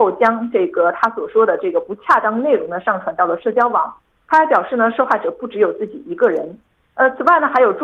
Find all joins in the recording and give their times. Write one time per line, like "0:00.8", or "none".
none